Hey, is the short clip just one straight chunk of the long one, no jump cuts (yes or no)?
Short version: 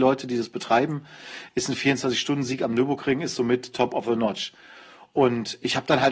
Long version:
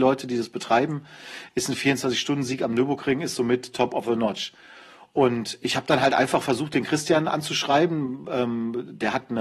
yes